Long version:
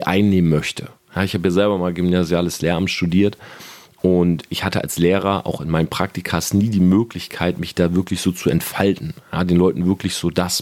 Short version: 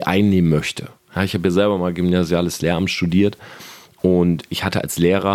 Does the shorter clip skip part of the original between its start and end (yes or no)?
no